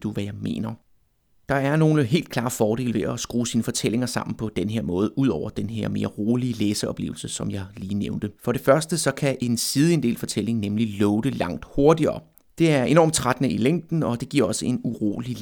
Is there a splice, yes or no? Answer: yes